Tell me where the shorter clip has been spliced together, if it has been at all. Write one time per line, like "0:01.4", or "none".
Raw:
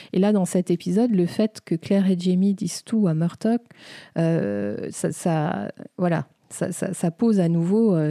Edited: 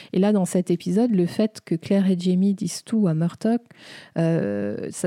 none